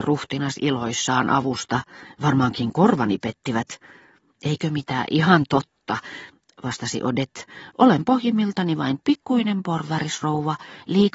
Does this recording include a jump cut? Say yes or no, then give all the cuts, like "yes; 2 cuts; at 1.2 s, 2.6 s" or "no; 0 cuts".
no; 0 cuts